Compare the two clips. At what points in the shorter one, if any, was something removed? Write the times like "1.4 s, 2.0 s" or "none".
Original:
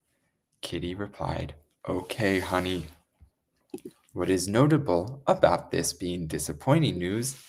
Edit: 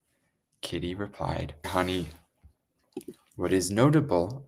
1.6 s